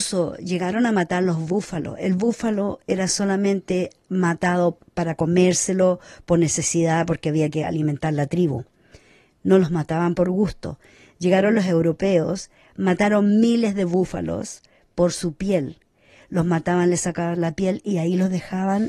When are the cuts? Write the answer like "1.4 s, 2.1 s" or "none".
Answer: none

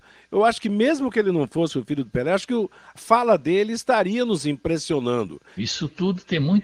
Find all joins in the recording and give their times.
3.0 s, 5.6 s

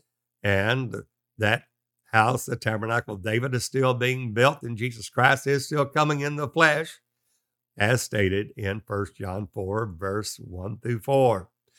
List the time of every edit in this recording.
none

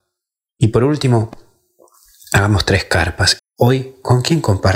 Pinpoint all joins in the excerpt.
3.4 s

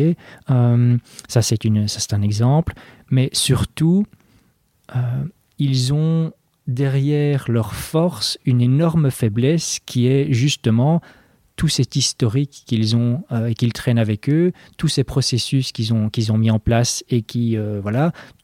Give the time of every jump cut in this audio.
16.1 s

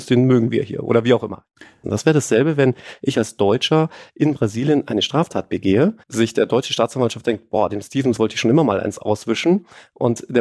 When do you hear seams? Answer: 1.8 s, 6.0 s

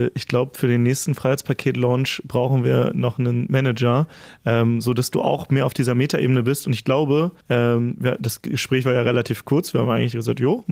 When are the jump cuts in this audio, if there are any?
7.4 s

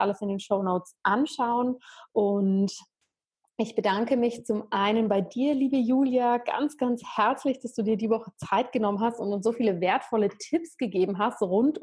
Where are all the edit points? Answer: none

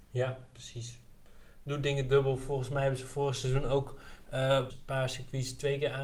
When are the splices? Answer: 4.7 s

